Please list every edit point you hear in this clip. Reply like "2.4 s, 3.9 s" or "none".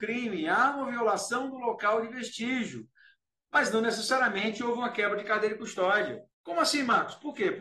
6.3 s